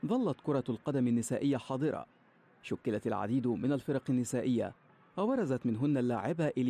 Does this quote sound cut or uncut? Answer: uncut